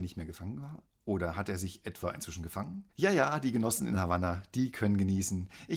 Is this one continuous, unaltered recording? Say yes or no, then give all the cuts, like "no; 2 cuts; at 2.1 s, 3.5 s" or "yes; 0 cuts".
no; 1 cut; at 2.9 s